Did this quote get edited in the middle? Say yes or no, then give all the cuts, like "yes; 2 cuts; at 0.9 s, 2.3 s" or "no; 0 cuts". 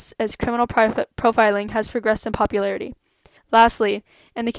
yes; 1 cut; at 3.4 s